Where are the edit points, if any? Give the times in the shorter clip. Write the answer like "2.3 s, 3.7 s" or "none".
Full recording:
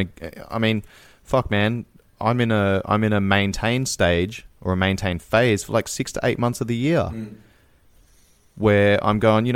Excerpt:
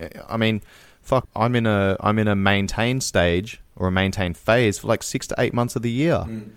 1.2 s